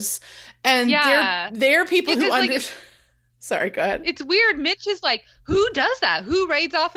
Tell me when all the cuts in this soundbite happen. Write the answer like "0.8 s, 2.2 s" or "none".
none